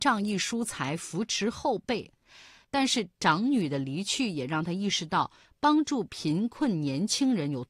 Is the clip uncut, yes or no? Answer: no